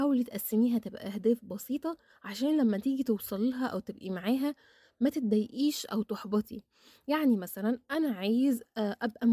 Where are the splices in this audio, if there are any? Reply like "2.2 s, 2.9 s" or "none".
none